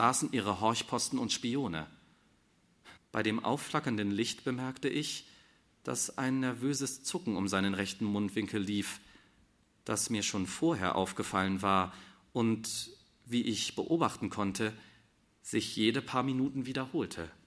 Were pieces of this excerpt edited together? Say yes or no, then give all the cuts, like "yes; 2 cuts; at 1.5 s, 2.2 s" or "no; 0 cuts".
yes; 1 cut; at 3.0 s